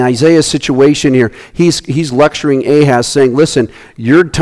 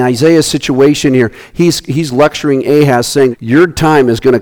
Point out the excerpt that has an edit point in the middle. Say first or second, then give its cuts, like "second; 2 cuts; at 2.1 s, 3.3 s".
second; 1 cut; at 3.3 s